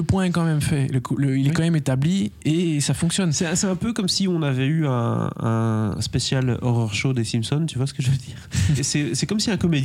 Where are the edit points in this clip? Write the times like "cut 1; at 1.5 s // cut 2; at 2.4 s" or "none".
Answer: cut 1; at 8.8 s